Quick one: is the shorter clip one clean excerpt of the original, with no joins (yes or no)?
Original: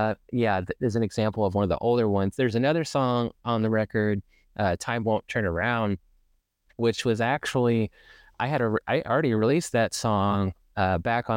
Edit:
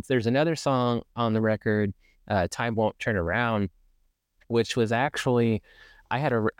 yes